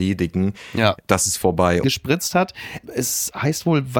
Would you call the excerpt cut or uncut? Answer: cut